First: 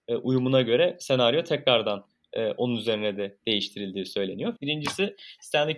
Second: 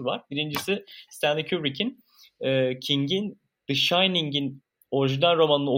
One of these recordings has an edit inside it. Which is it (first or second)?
first